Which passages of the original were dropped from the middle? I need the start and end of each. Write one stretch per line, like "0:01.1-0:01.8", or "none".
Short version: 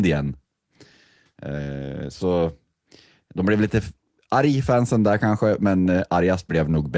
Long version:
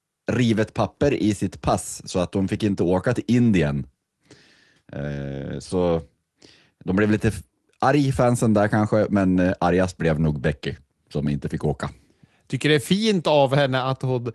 none